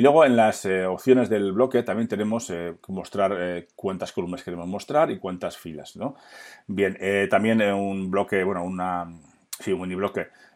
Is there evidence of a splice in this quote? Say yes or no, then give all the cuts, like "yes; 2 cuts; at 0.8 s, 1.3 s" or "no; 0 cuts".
no; 0 cuts